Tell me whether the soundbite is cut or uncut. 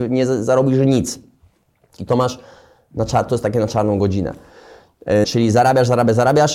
cut